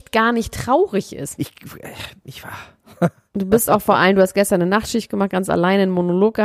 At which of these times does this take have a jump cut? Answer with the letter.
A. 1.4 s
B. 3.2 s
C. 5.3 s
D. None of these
A